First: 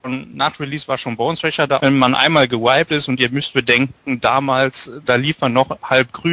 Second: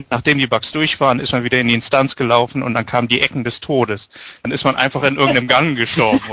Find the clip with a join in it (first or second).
first